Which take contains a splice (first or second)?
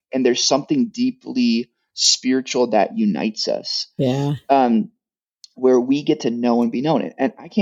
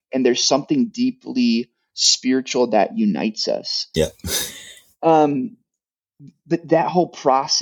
second